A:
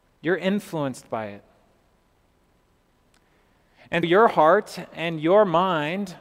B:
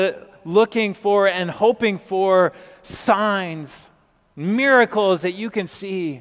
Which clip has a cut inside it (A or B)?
A